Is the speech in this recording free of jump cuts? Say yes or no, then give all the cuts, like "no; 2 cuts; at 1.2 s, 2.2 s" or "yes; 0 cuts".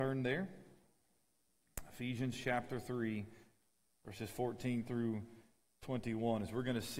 yes; 0 cuts